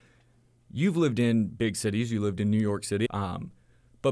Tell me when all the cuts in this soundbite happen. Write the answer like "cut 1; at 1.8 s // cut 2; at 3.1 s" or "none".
cut 1; at 3.1 s